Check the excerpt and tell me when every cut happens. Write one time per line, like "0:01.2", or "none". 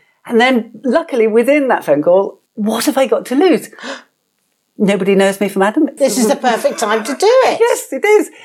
0:02.5
0:06.0